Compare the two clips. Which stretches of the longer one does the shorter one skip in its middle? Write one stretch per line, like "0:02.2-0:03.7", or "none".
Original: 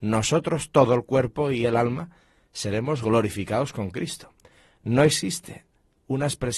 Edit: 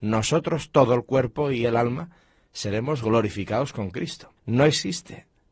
0:04.4-0:04.7